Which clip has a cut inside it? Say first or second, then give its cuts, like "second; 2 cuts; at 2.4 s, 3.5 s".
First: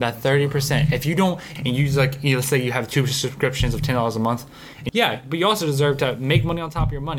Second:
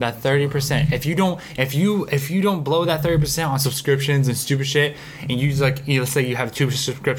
first; 2 cuts; at 1.6 s, 4.9 s